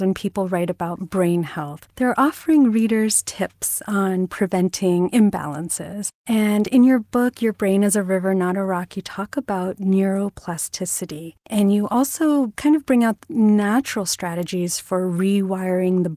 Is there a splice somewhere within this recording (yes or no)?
no